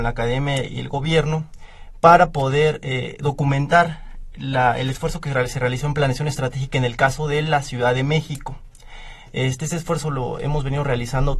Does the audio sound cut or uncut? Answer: uncut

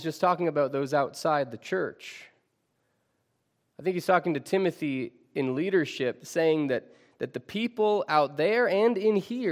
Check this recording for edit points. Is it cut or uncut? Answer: uncut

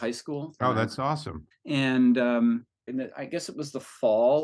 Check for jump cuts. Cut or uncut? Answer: cut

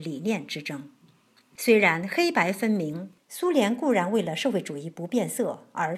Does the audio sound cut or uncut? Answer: cut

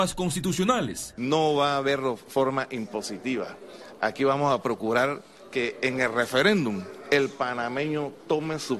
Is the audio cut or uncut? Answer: uncut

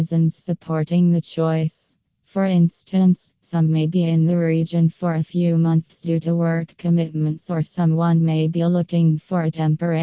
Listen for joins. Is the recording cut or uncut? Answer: uncut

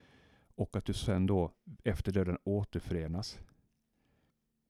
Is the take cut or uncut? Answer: uncut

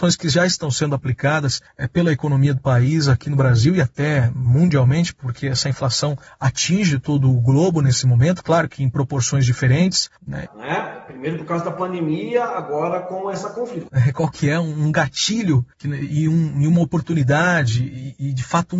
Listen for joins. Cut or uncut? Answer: cut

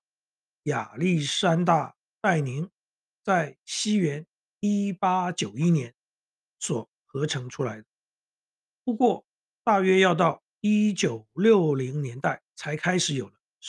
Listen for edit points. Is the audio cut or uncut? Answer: cut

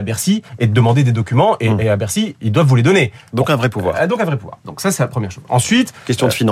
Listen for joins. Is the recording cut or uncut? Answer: uncut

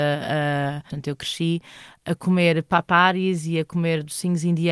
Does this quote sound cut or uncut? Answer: cut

